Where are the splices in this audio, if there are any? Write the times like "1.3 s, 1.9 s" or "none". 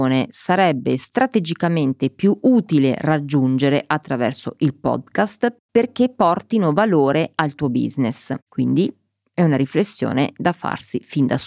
8.5 s